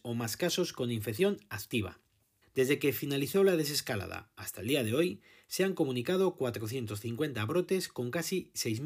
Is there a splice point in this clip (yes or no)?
yes